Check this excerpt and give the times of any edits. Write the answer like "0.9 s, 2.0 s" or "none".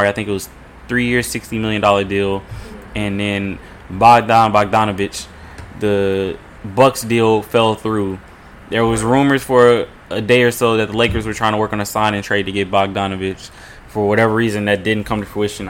none